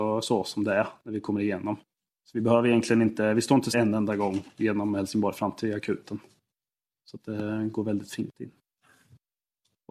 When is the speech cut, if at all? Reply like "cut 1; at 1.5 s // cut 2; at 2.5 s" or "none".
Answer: cut 1; at 3.7 s